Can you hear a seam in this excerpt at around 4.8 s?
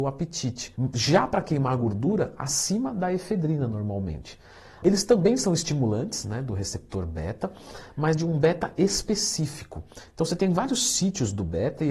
yes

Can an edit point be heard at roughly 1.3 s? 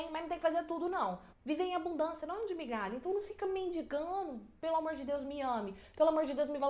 yes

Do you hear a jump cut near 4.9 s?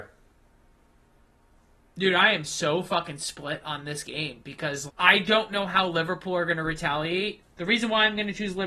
yes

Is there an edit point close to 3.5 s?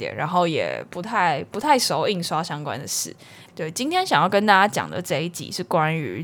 yes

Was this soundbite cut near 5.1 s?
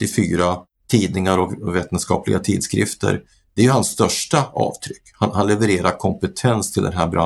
no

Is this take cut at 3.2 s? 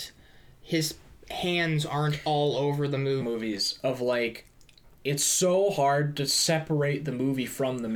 yes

